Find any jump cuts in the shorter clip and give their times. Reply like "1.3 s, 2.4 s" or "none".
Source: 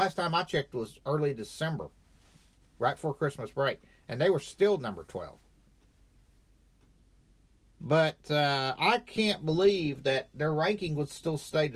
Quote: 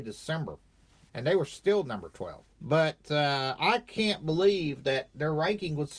1.1 s, 2.5 s